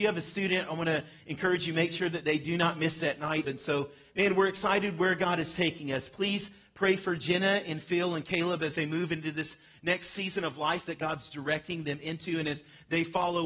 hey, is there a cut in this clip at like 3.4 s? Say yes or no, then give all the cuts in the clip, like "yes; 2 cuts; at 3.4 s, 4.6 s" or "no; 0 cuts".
yes; 1 cut; at 3.4 s